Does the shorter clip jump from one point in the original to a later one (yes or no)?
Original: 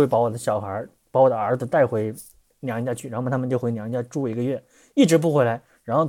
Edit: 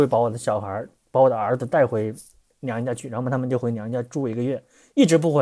no